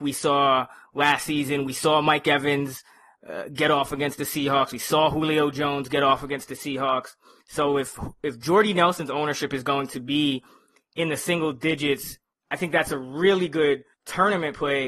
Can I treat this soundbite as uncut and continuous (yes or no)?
yes